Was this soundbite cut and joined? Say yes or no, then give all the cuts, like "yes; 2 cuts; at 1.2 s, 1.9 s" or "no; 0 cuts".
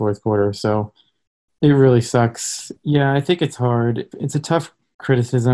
yes; 2 cuts; at 2.8 s, 4.1 s